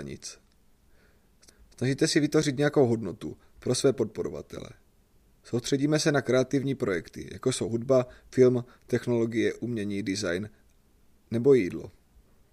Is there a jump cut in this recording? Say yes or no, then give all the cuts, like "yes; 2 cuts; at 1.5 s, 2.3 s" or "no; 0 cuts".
no; 0 cuts